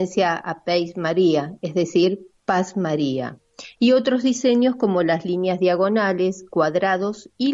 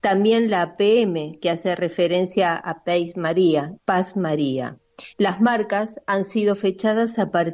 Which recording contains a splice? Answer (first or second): second